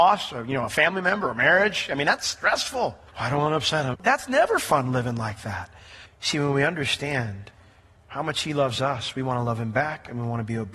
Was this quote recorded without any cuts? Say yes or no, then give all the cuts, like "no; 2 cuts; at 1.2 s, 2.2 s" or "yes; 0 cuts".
no; 2 cuts; at 3.9 s, 6.1 s